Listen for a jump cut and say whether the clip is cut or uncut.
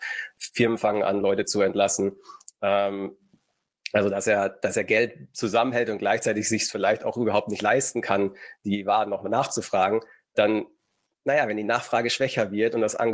uncut